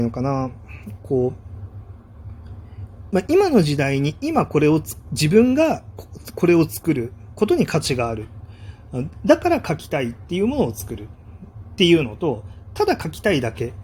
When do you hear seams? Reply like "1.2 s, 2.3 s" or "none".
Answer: none